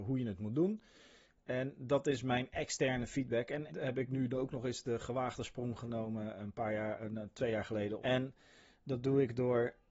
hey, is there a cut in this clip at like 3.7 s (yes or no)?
yes